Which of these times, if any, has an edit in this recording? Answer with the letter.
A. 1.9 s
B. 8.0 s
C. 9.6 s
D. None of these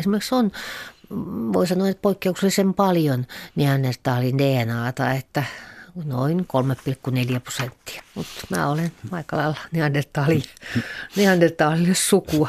B